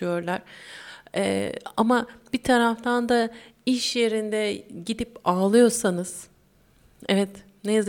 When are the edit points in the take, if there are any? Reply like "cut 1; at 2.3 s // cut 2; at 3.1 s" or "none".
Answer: none